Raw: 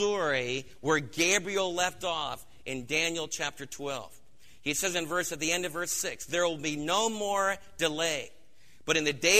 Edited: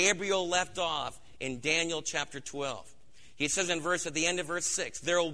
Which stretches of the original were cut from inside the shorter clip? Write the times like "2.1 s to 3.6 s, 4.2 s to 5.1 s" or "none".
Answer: none